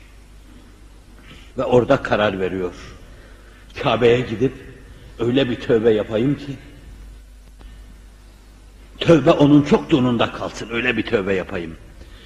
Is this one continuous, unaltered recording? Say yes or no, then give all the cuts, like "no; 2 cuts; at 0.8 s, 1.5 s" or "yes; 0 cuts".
yes; 0 cuts